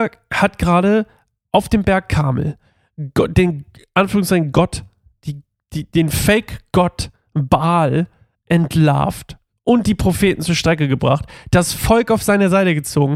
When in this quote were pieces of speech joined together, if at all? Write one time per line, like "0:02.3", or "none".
none